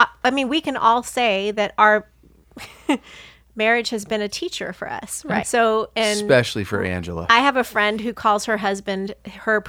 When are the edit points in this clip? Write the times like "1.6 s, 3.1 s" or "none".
5.4 s